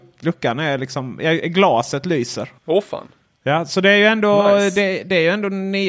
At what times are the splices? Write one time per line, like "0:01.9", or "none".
0:02.6